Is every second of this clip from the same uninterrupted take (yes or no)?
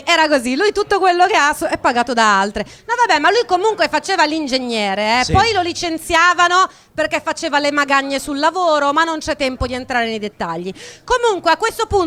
yes